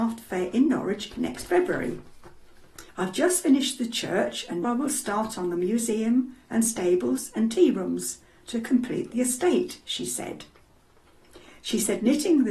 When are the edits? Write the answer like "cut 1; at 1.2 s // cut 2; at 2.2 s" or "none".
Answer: cut 1; at 2.9 s // cut 2; at 4.6 s